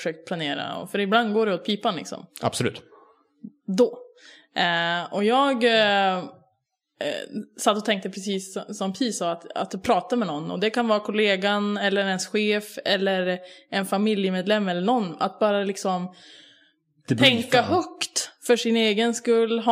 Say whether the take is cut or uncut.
uncut